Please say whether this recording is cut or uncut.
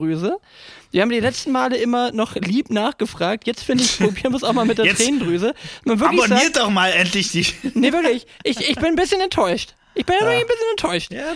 uncut